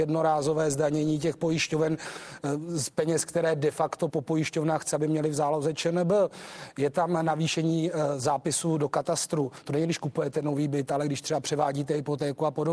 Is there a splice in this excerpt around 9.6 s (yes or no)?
no